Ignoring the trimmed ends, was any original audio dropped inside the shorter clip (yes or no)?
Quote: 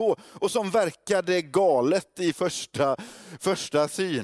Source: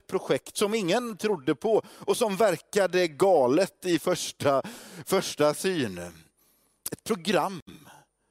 no